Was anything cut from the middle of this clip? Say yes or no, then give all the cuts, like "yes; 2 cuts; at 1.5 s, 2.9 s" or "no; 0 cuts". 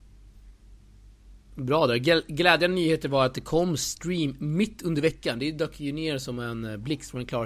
no; 0 cuts